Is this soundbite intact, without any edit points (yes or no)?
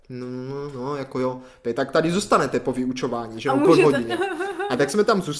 yes